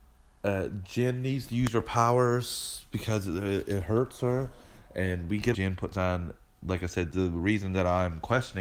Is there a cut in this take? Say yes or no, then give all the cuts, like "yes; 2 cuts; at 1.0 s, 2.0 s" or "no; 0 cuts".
yes; 2 cuts; at 5.5 s, 7.1 s